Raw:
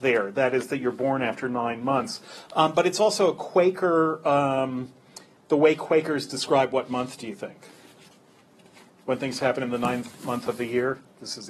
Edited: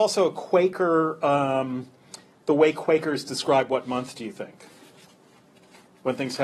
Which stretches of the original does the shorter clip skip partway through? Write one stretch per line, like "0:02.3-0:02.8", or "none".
none